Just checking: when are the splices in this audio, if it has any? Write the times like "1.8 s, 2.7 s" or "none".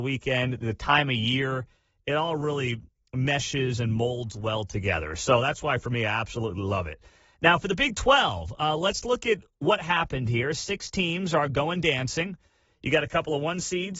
none